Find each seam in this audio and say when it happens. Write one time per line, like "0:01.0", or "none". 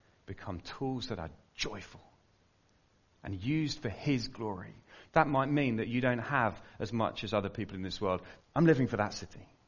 0:05.1
0:08.4